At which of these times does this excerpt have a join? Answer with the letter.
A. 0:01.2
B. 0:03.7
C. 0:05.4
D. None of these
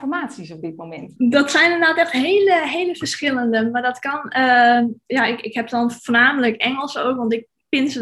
A